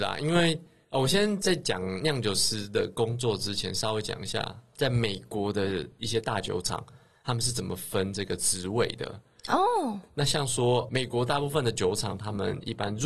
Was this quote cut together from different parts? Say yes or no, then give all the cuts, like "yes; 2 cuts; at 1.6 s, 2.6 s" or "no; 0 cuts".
no; 0 cuts